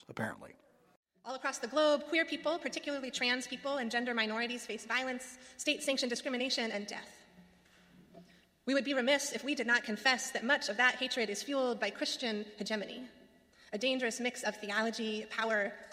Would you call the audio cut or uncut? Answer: uncut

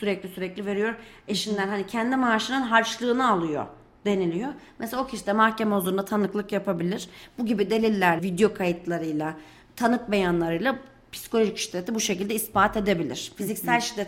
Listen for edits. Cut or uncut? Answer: cut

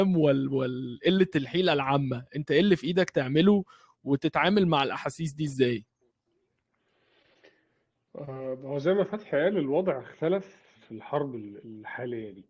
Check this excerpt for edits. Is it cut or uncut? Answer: cut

